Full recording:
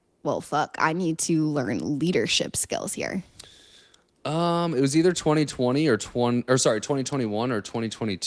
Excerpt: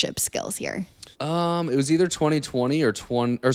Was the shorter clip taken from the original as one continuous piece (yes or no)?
no